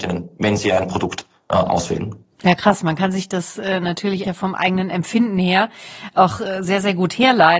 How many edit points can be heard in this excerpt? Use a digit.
1